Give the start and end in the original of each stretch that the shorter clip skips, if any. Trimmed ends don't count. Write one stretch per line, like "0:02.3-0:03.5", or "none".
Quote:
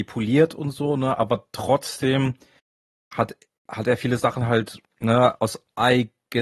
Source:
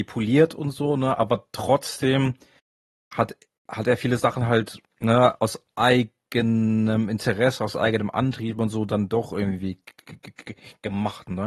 none